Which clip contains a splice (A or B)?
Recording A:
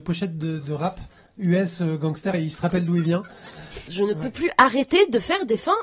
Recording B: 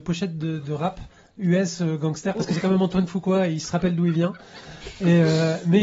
A